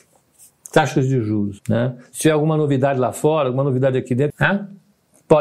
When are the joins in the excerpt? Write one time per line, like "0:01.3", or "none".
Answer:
0:01.6
0:04.3